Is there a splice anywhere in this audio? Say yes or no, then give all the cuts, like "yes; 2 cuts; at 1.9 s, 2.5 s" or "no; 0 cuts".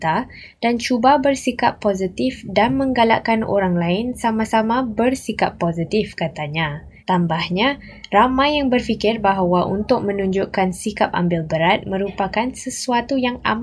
yes; 1 cut; at 7.0 s